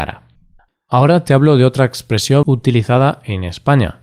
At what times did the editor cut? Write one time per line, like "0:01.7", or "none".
0:02.4